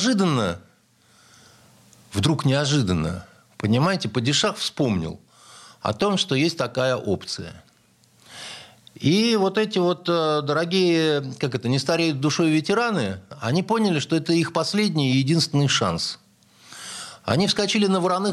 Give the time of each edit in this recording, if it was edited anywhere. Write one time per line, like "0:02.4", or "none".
none